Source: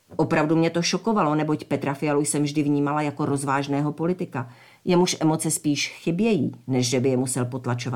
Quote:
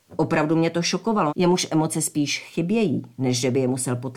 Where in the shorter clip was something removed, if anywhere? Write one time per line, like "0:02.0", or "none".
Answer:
0:01.3